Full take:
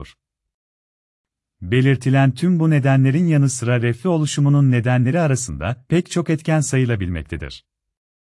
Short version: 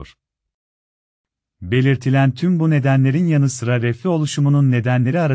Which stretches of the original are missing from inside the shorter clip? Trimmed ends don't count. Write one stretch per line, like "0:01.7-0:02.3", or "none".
none